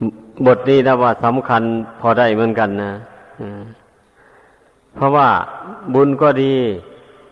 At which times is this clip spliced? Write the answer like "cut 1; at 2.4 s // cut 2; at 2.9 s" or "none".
none